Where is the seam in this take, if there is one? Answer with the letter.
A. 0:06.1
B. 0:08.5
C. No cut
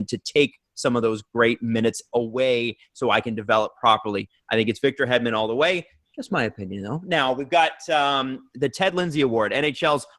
C